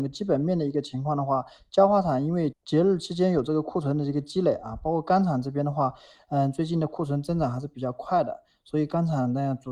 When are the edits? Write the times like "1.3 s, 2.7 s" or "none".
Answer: 2.5 s

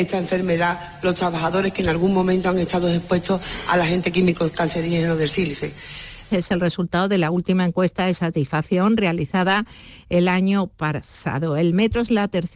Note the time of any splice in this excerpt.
6.3 s

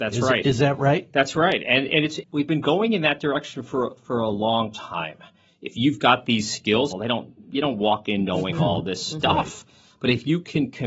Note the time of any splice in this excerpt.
2.2 s, 5.5 s, 6.9 s

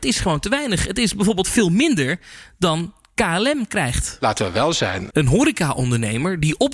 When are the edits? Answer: 5.1 s

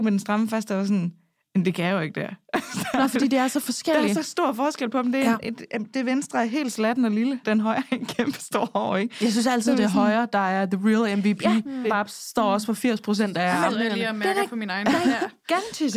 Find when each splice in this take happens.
7.4 s, 11.8 s

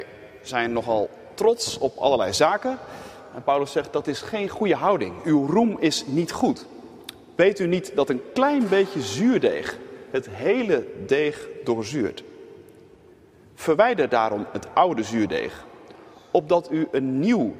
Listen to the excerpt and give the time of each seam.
none

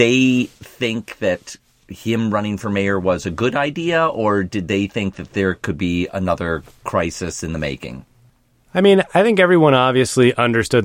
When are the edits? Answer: none

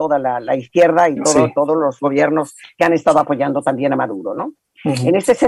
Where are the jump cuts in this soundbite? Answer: 2.0 s

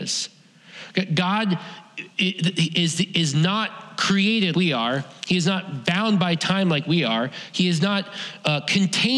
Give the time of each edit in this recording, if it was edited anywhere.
4.5 s

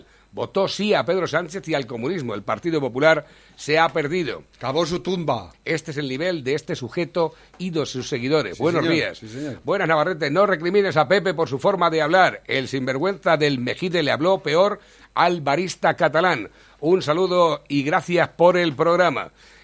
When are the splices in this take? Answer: 5.5 s

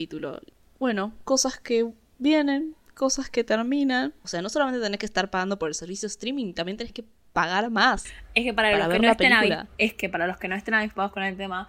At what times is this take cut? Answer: 4.2 s

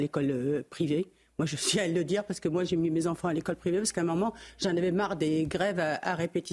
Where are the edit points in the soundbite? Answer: none

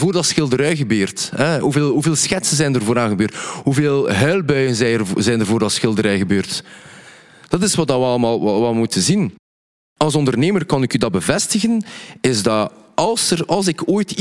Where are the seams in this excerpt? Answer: none

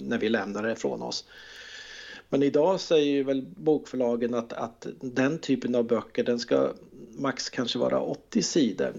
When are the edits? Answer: none

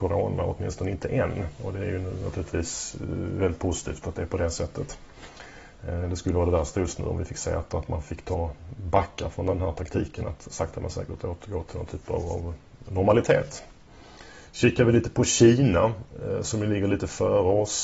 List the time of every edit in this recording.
none

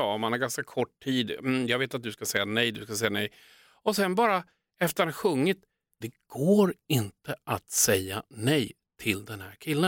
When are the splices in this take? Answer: 6.0 s

